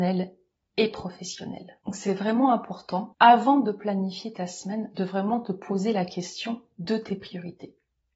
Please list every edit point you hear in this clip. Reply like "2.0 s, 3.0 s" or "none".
none